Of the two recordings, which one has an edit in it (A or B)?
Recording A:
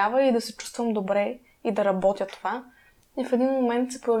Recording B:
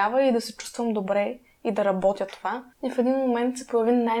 B